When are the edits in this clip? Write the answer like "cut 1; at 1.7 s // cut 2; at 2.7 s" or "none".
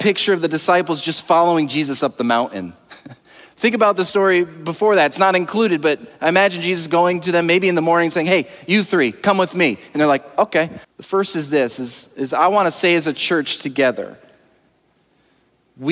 cut 1; at 10.8 s